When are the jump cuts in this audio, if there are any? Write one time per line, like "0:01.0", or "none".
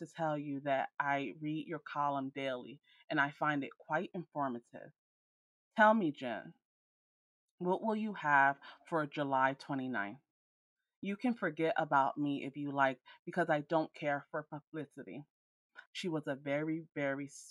0:15.9